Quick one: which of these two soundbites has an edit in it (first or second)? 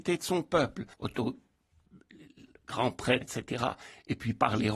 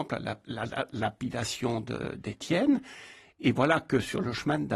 first